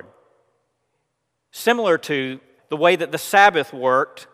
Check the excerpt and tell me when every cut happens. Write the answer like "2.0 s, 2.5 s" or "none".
2.6 s